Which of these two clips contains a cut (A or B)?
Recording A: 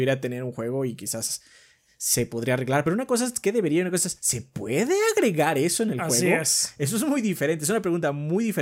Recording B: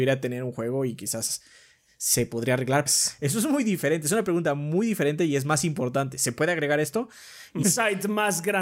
B